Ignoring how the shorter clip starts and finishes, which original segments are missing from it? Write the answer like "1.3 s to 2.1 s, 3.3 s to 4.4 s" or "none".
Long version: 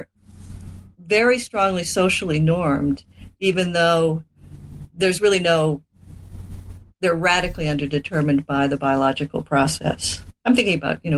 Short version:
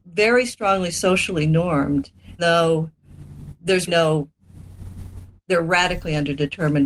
3.3 s to 3.7 s, 5.2 s to 5.4 s